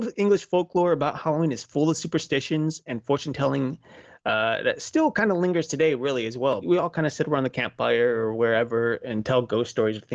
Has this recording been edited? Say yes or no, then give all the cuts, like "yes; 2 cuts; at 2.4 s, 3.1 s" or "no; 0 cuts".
yes; 1 cut; at 6.6 s